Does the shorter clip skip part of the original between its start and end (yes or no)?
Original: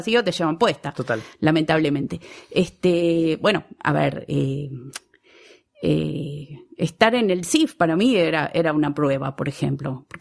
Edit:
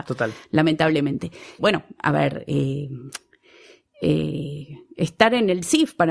yes